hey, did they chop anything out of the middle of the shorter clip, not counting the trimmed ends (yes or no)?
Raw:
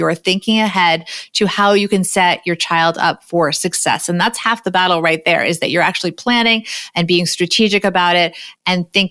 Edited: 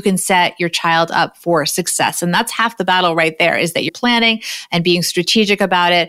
yes